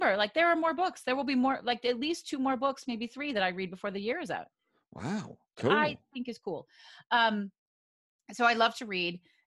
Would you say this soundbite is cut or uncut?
uncut